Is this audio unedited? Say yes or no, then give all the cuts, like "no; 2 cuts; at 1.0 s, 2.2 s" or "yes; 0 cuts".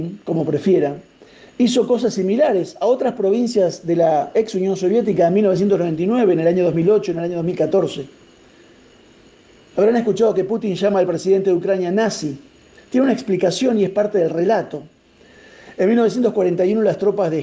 yes; 0 cuts